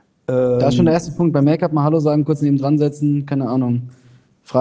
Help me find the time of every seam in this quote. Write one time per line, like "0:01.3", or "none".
none